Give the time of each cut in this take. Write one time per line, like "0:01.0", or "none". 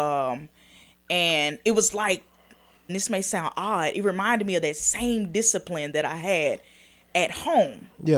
0:02.9